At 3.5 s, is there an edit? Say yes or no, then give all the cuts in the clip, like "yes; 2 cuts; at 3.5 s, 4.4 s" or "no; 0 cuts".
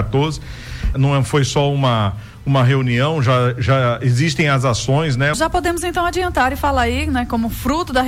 no; 2 cuts; at 0.9 s, 5.3 s